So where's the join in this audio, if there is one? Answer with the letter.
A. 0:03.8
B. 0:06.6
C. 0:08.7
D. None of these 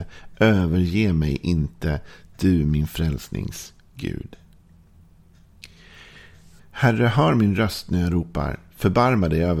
B